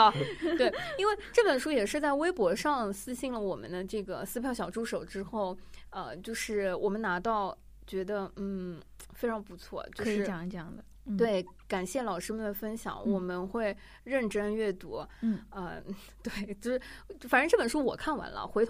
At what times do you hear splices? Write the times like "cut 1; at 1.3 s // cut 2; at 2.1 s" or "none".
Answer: none